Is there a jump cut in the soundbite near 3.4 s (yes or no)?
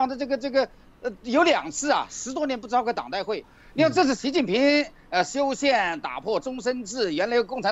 yes